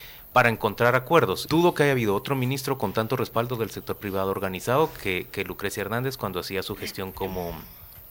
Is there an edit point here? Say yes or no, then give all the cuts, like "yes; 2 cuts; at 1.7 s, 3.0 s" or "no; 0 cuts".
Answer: yes; 1 cut; at 1.5 s